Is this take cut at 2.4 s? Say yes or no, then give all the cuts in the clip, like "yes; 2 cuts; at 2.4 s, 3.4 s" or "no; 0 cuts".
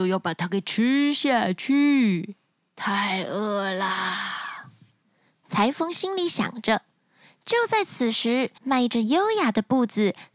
no; 1 cut; at 8.6 s